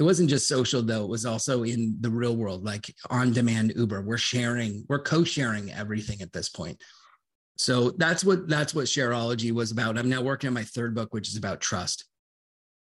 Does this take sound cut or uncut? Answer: uncut